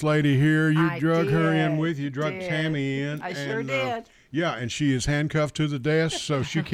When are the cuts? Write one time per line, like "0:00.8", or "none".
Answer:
none